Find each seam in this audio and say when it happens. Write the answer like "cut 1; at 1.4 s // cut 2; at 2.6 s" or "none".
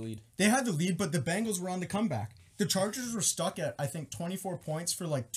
none